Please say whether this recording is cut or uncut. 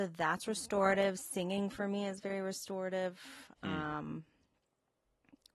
uncut